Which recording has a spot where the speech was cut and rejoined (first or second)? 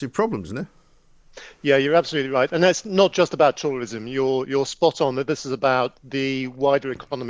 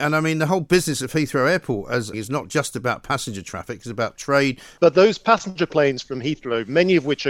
second